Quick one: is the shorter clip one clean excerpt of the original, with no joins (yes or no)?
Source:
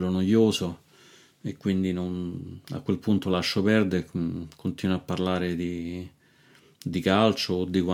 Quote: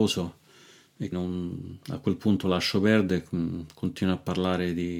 no